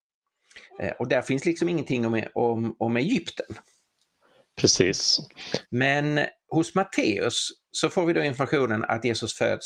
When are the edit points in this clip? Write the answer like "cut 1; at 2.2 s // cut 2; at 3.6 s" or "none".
cut 1; at 5.6 s